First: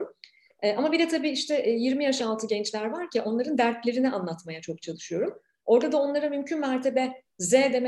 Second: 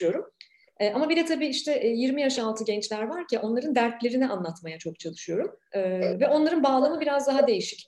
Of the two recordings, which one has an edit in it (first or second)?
second